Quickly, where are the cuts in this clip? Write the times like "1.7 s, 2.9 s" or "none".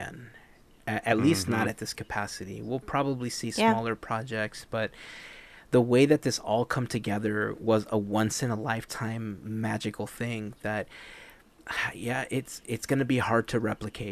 none